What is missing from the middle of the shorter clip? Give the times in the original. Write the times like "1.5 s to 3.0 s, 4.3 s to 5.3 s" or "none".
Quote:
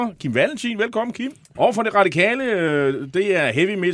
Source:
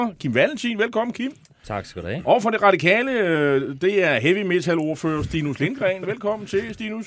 1.5 s to 2.2 s